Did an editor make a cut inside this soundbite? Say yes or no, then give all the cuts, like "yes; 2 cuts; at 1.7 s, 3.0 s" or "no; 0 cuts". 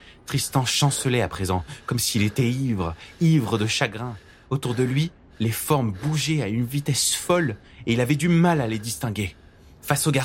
no; 0 cuts